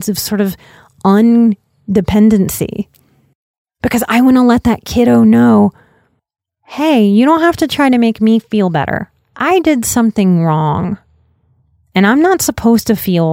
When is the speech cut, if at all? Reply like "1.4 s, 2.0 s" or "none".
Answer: none